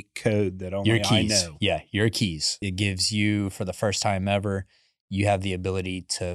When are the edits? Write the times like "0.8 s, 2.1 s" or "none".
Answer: 2.6 s